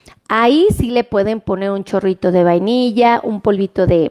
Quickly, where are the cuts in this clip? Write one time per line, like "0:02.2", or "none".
none